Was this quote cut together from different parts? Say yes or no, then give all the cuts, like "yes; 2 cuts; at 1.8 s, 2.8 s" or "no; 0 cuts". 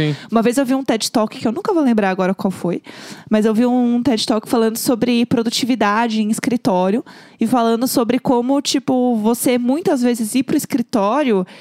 no; 0 cuts